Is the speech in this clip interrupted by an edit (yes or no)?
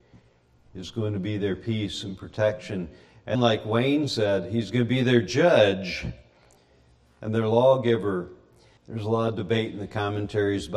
yes